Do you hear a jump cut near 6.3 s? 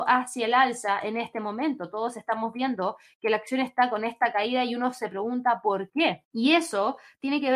yes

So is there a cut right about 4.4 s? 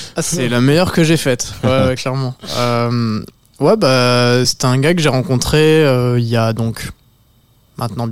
yes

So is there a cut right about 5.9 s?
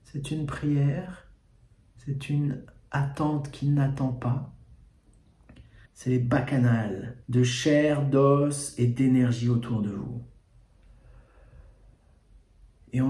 yes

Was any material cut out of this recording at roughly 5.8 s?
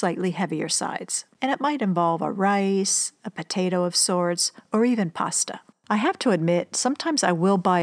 no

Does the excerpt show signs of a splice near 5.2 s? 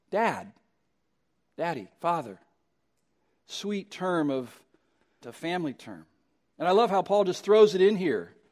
yes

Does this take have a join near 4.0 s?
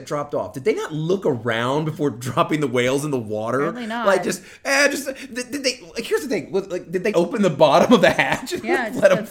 no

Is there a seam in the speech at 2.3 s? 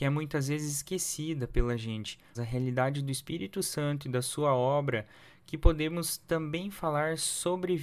yes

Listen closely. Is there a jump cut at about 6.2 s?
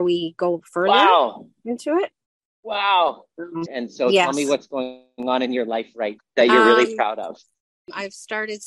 yes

